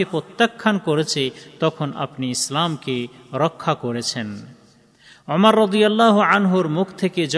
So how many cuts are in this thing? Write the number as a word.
zero